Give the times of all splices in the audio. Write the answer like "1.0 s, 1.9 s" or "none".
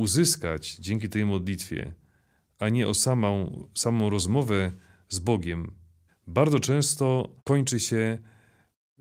6.1 s, 7.4 s